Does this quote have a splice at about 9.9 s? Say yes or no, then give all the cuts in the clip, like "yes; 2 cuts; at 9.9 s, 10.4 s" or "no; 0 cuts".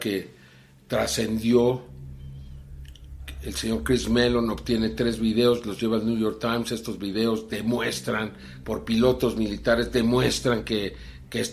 no; 1 cut; at 8.6 s